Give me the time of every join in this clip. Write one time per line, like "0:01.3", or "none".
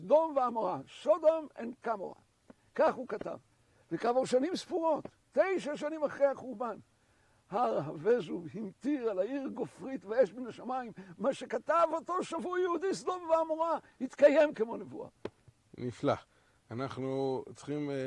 none